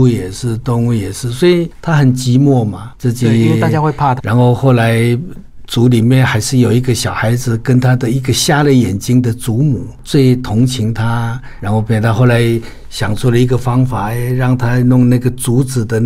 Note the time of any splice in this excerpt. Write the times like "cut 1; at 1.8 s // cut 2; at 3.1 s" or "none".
cut 1; at 4.2 s